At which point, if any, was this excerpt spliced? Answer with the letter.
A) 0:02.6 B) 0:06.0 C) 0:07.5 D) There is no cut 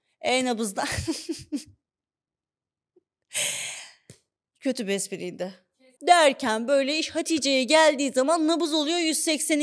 B